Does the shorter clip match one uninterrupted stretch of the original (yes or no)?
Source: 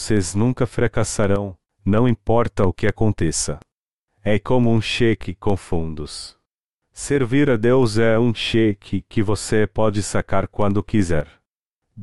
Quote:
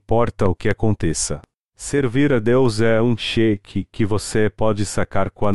no